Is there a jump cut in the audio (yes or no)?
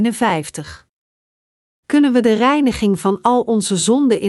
no